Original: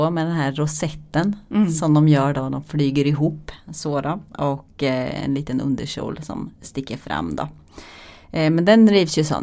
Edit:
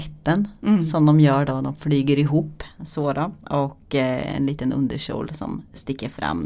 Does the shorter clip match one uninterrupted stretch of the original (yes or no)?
yes